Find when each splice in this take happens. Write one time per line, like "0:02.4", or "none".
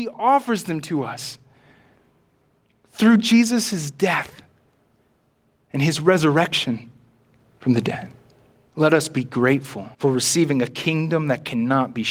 0:08.7
0:09.9